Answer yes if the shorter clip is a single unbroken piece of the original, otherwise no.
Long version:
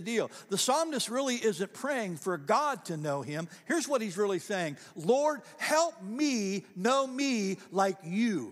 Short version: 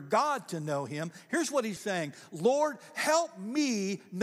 no